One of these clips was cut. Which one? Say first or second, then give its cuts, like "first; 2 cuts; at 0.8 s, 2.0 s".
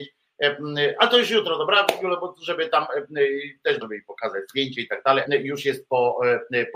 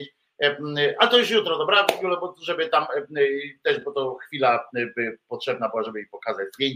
first; 2 cuts; at 3.8 s, 5.3 s